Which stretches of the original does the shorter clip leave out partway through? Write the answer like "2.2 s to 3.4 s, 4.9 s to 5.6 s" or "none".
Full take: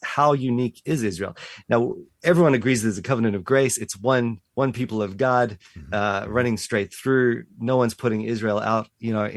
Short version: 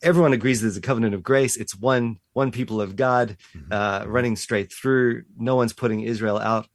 none